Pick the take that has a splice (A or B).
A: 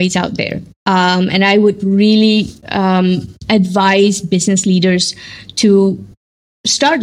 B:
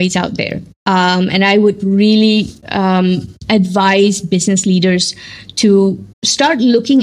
B